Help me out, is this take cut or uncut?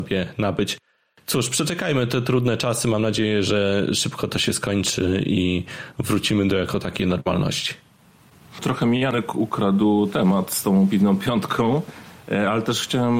uncut